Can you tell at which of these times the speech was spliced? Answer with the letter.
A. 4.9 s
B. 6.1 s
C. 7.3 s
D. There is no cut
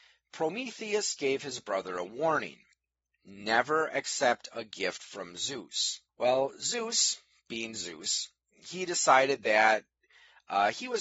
B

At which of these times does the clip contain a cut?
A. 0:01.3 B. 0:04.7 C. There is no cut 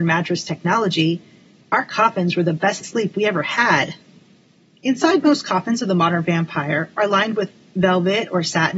C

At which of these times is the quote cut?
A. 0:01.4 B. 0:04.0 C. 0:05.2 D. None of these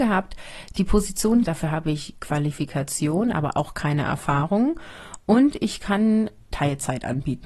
A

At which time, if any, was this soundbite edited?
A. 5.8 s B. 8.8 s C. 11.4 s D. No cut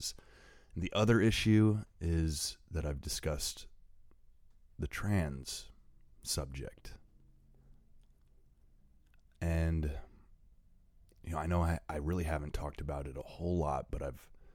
D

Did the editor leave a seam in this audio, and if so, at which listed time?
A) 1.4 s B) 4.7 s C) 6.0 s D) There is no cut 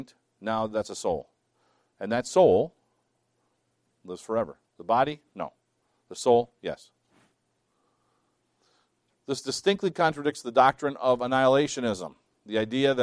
B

